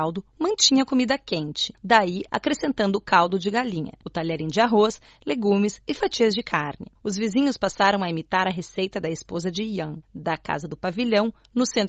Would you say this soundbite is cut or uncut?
cut